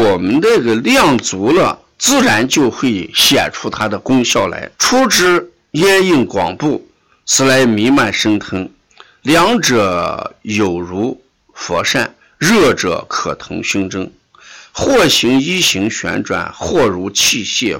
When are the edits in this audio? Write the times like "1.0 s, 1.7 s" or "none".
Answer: 4.7 s

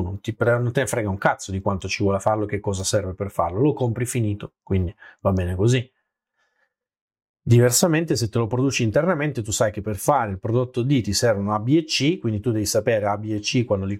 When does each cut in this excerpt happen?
none

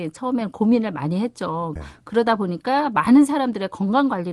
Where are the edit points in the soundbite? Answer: 1.8 s

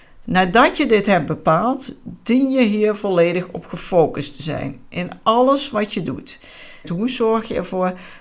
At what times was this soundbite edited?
6.8 s

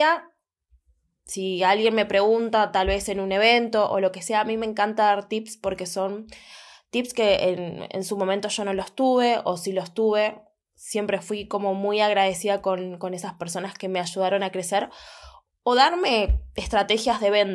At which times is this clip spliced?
none

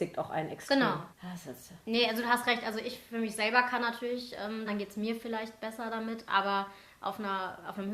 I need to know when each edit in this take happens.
1.1 s, 4.7 s

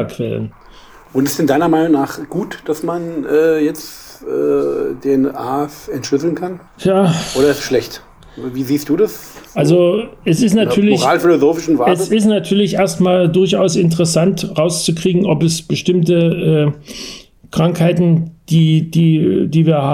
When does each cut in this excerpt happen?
6.7 s

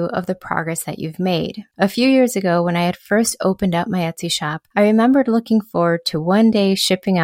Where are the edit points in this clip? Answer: 1.7 s

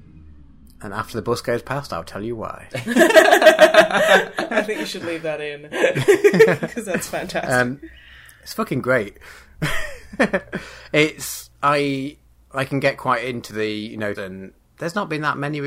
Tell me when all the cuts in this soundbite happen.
14.1 s

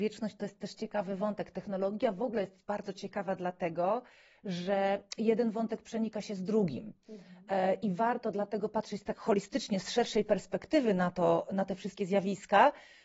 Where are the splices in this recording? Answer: none

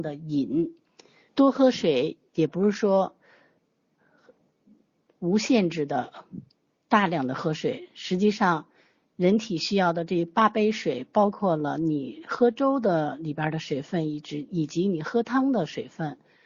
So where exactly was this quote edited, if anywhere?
1.3 s

